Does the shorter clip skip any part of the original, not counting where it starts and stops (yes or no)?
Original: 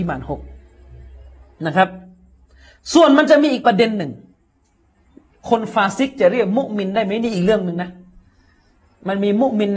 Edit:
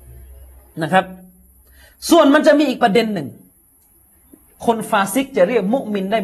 no